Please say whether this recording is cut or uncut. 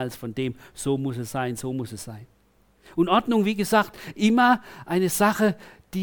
uncut